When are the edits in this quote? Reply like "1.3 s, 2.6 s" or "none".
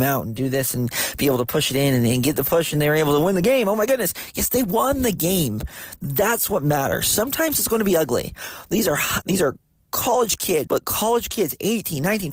9.2 s, 10.7 s